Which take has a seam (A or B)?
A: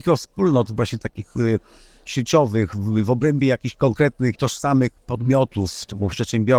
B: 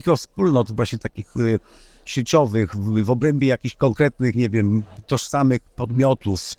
A